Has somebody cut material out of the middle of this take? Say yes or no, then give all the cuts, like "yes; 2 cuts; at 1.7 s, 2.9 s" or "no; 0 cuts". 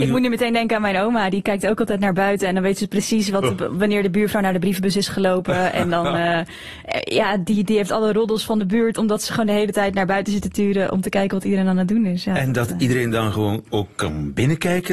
no; 0 cuts